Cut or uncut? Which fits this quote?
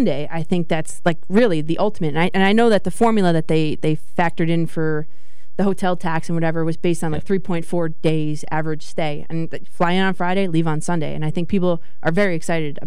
uncut